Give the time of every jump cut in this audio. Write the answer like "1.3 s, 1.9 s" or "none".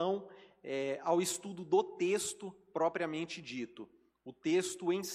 none